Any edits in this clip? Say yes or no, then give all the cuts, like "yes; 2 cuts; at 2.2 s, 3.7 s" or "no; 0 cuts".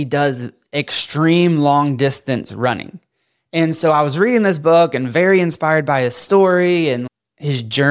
no; 0 cuts